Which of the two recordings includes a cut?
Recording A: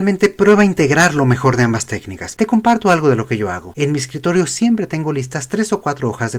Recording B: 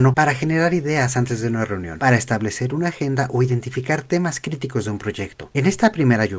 A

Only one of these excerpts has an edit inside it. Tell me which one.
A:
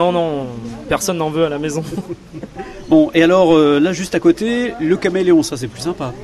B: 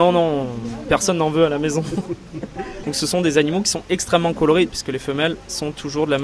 B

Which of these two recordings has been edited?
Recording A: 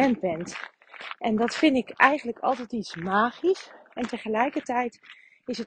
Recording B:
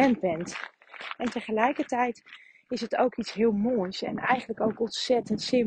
B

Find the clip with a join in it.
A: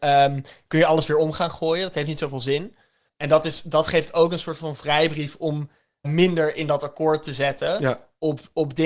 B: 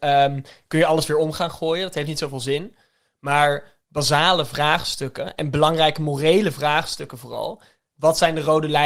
A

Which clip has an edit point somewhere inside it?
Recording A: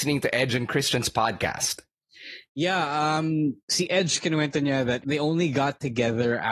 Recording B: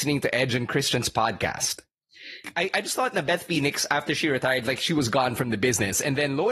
B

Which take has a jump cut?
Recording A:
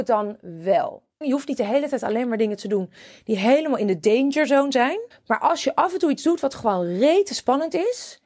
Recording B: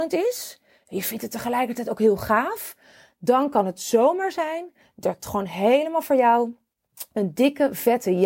A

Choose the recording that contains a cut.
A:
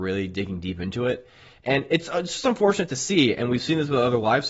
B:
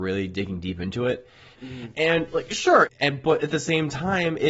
B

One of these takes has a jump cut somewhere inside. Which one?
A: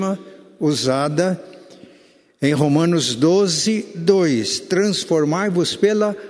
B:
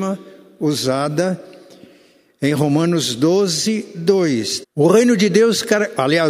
B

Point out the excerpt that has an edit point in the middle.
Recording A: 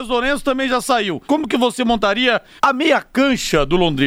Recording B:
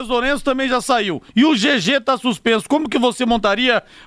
A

